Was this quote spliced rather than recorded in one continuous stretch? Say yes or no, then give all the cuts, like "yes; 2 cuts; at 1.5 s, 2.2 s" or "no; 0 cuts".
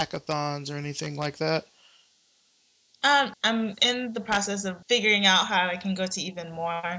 yes; 2 cuts; at 3.3 s, 4.8 s